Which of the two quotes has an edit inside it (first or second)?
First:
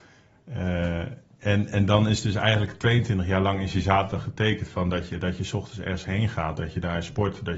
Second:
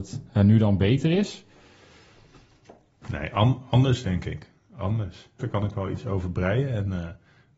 second